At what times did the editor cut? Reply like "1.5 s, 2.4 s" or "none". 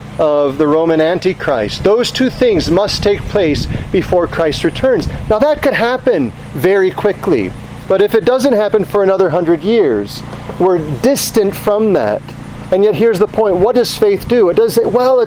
none